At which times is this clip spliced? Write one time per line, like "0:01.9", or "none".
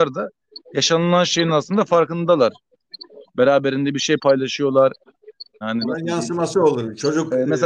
0:03.2
0:05.6